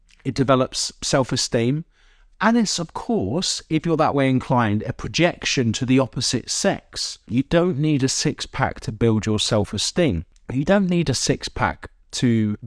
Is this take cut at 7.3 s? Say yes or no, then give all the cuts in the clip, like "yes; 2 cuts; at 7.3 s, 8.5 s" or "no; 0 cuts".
yes; 1 cut; at 7.3 s